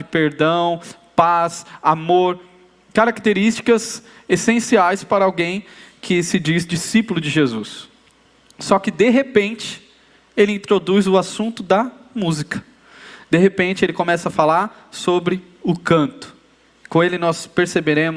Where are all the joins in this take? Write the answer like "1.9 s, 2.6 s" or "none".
none